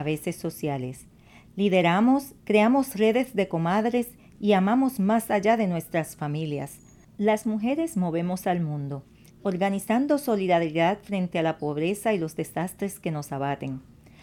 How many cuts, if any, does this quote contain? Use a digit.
3